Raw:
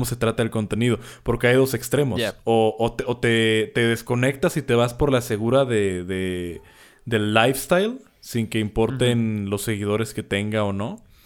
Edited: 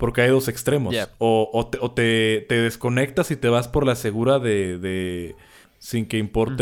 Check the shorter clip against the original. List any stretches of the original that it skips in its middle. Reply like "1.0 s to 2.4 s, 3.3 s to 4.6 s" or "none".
6.9 s to 8.1 s